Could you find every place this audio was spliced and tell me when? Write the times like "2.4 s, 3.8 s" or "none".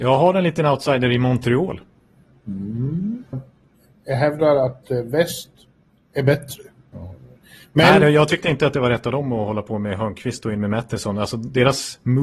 3.3 s, 6.9 s